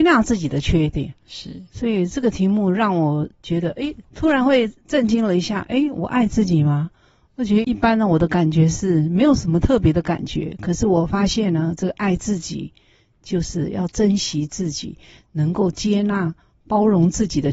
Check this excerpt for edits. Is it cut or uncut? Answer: uncut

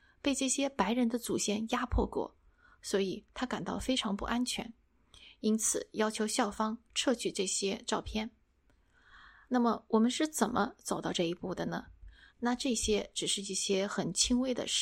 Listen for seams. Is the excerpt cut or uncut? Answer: cut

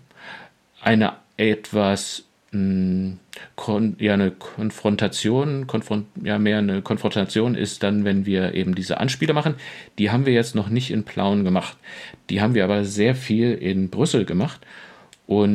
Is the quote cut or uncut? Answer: uncut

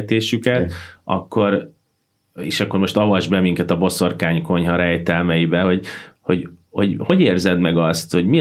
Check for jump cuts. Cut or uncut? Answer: uncut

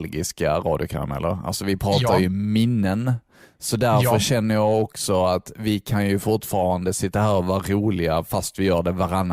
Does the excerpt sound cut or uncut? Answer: uncut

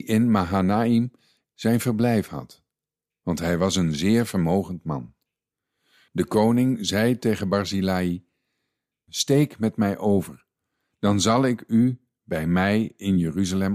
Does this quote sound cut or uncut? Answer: uncut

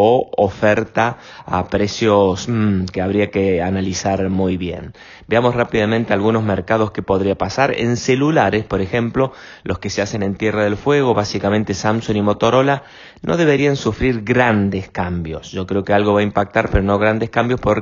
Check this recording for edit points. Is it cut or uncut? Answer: uncut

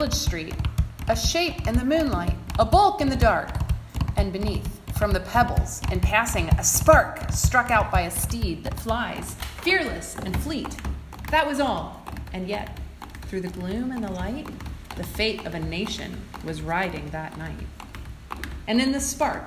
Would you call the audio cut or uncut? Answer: uncut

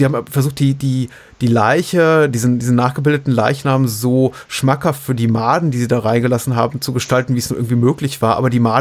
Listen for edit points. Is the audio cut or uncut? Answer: uncut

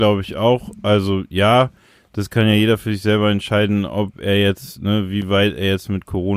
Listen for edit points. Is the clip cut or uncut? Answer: uncut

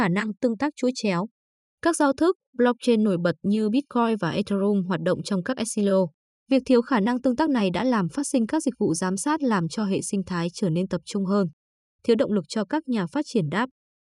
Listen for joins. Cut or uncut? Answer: cut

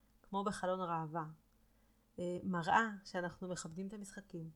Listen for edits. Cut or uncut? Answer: uncut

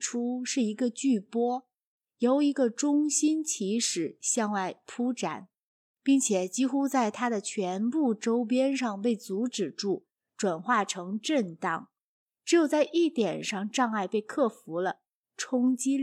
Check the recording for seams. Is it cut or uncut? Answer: uncut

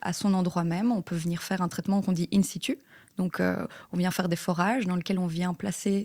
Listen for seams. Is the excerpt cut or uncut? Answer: uncut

